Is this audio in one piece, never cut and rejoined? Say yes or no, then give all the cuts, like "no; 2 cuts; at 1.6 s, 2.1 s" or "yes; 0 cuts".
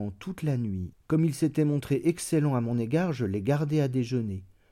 no; 1 cut; at 0.9 s